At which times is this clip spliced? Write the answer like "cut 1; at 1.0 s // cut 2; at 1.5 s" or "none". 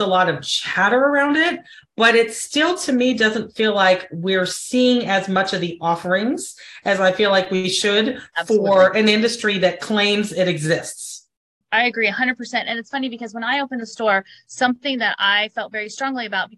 cut 1; at 11.6 s